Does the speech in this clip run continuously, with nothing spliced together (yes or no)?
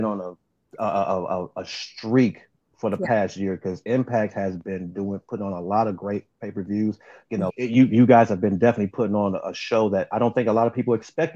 no